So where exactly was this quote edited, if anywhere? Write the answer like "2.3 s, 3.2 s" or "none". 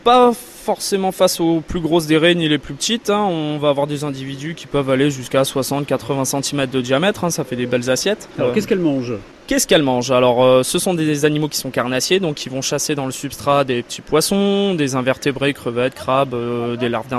none